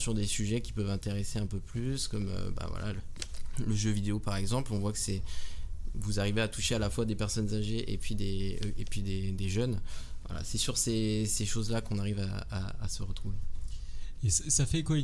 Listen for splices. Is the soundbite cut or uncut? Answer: uncut